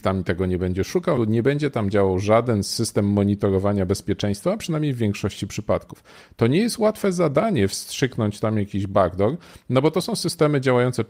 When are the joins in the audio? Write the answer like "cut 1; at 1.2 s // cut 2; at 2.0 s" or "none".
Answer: cut 1; at 1.2 s